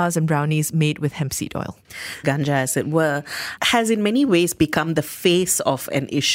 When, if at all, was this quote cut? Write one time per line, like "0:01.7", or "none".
0:02.2
0:03.6